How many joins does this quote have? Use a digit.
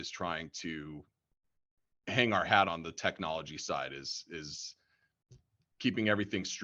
1